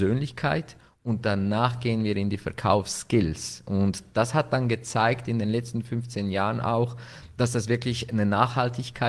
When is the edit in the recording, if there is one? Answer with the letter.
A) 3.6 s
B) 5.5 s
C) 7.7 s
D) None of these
D